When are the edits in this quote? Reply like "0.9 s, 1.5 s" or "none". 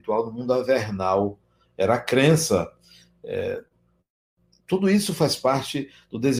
none